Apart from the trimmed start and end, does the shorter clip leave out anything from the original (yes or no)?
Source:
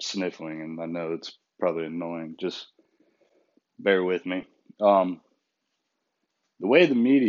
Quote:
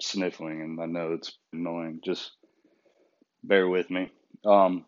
yes